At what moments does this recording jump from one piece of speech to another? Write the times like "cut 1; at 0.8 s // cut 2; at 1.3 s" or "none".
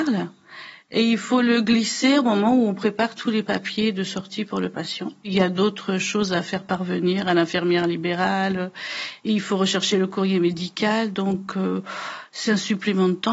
none